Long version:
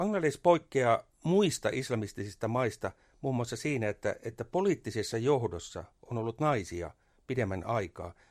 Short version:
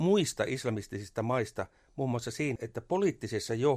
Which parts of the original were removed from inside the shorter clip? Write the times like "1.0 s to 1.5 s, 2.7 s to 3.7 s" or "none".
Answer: 3.8 s to 4.2 s

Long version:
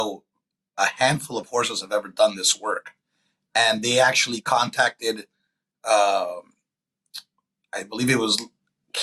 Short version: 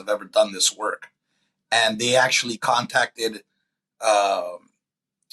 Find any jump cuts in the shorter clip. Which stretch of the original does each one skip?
none

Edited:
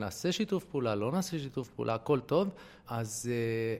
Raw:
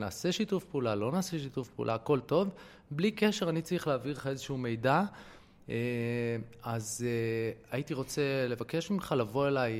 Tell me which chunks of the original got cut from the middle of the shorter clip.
2.8 s to 6.6 s

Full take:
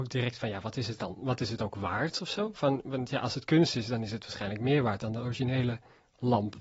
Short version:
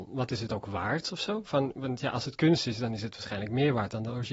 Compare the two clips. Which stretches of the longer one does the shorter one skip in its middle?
none

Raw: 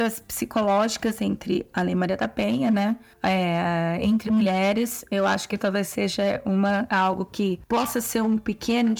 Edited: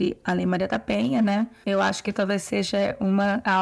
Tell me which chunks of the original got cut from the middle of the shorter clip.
3.1 s to 5.1 s

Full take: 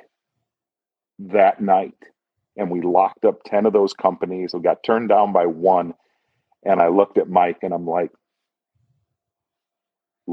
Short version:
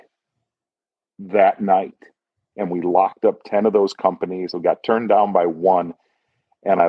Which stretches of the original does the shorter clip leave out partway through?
none

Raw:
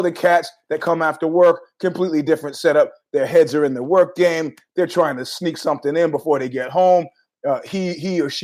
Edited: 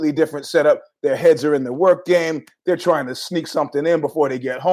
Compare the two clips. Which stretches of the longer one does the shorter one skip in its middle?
none

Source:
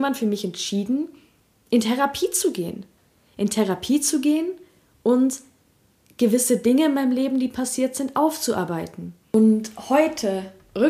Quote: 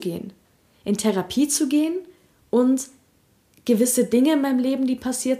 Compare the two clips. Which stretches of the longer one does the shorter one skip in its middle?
none

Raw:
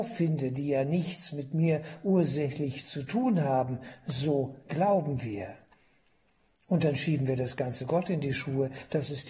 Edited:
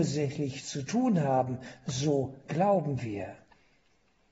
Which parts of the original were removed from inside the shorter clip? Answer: none

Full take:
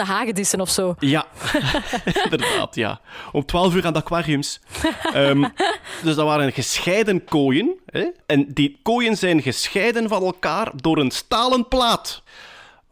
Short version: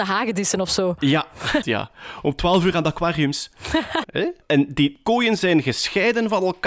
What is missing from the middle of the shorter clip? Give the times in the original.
1.6 s to 2.7 s, 5.1 s to 7.8 s

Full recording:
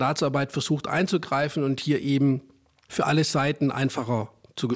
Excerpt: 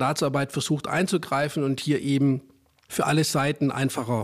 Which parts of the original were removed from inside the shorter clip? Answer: none

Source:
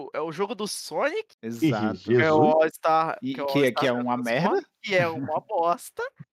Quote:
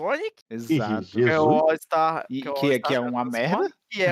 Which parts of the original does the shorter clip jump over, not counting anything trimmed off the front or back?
none

